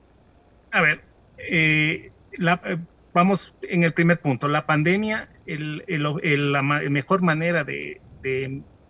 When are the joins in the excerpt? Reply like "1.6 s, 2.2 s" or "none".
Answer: none